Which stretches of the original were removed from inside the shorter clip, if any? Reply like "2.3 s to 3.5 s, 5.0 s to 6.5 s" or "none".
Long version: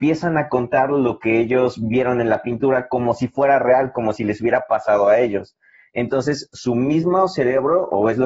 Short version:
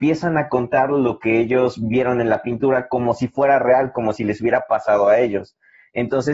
none